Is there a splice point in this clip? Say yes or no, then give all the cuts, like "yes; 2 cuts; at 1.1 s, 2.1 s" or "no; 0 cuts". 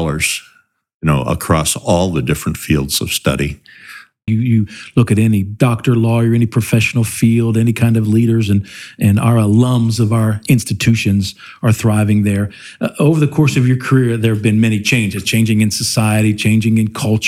yes; 1 cut; at 4.3 s